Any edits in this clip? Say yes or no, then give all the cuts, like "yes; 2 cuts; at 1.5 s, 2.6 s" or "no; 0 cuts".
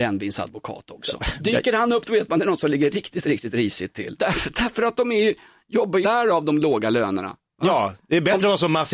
yes; 2 cuts; at 4.2 s, 6.0 s